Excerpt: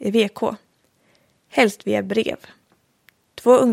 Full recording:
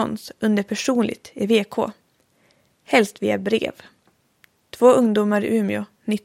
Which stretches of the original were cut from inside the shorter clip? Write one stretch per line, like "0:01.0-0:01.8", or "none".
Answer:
none